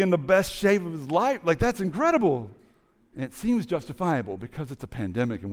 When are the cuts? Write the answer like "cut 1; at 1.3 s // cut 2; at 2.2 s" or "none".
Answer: cut 1; at 3.1 s